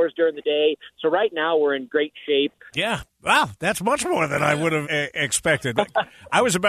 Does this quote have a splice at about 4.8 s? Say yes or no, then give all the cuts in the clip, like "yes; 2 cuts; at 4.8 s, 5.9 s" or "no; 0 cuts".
yes; 2 cuts; at 2.7 s, 4.8 s